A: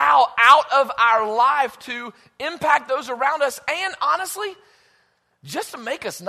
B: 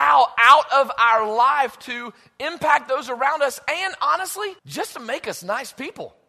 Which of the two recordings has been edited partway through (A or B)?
B